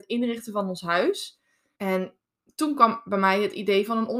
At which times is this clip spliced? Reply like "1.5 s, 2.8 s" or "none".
1.8 s